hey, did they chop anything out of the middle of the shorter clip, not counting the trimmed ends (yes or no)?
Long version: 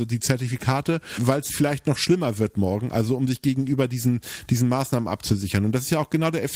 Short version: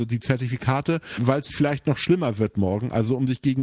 no